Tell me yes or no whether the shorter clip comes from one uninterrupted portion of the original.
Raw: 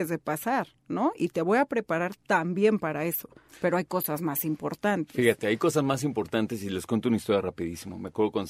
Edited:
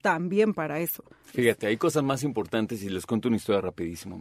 no